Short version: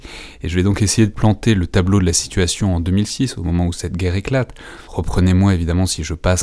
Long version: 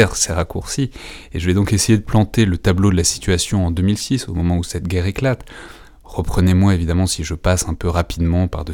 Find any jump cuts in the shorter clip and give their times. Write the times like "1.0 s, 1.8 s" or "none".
4.9 s